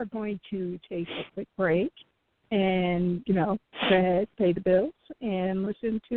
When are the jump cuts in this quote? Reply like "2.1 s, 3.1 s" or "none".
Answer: none